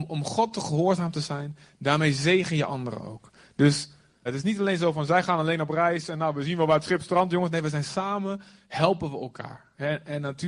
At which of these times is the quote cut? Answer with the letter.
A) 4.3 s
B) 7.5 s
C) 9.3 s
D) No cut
A